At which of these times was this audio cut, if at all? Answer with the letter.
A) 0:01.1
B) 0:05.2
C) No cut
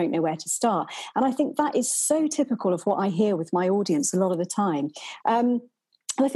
B